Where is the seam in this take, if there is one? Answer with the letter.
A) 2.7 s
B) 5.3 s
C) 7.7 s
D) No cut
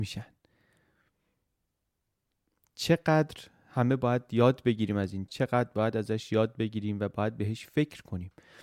B